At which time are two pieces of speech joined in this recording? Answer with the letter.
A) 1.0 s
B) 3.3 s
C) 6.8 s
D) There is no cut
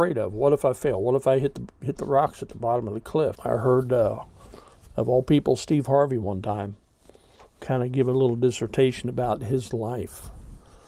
B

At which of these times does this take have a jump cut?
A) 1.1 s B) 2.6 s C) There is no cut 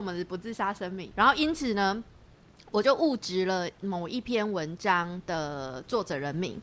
A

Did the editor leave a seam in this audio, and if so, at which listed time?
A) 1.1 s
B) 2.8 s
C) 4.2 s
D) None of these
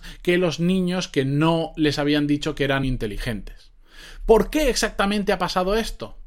B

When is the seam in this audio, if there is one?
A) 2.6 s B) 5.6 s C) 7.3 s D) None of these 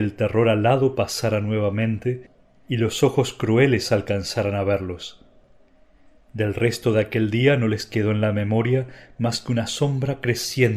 D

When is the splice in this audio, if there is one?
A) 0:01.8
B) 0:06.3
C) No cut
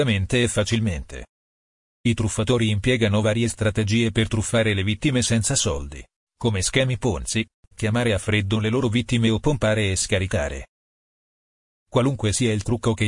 C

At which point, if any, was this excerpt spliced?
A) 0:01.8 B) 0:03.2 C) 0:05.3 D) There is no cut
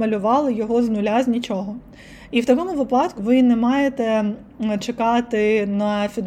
B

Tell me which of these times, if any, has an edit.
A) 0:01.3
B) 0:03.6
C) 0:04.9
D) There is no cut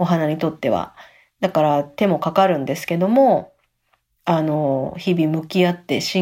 D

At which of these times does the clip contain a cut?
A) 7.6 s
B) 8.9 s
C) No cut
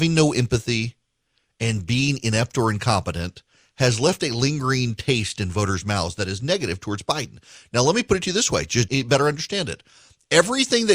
B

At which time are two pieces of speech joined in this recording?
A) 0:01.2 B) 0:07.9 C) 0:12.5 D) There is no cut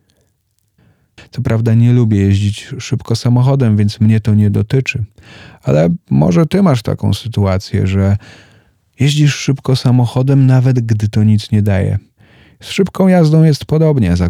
A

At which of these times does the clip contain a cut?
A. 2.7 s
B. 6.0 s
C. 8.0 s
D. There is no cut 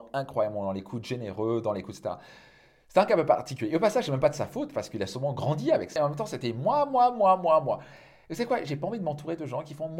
B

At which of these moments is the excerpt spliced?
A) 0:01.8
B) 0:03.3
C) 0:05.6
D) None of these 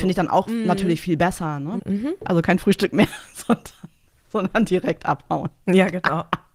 A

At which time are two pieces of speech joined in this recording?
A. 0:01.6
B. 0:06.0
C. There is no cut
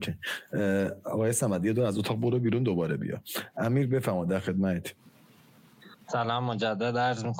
B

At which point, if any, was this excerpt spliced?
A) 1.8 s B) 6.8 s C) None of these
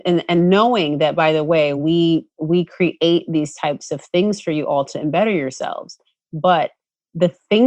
C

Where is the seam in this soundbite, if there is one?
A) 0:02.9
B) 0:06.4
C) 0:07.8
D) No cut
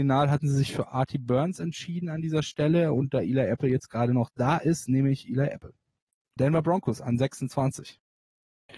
B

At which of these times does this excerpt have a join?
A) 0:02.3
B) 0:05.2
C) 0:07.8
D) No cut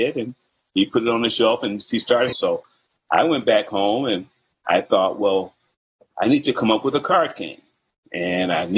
A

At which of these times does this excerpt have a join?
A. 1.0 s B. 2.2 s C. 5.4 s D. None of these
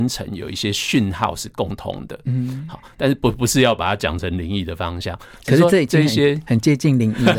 D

